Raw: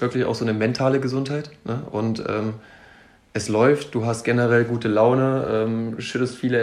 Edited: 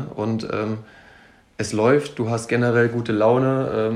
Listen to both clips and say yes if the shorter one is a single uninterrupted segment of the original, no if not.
yes